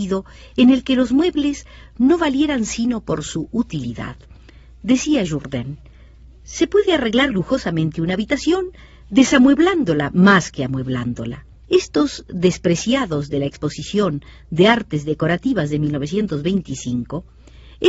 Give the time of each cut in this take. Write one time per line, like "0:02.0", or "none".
0:07.3
0:11.6